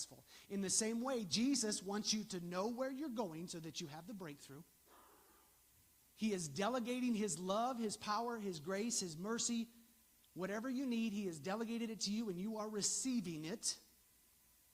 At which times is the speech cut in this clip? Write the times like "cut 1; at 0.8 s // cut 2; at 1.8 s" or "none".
none